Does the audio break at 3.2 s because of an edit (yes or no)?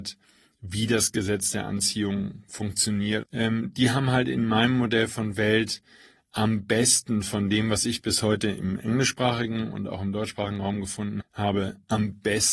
yes